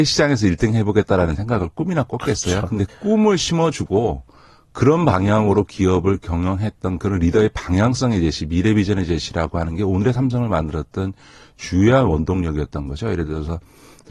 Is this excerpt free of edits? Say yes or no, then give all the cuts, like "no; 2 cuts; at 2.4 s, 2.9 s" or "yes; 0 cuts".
no; 1 cut; at 2.9 s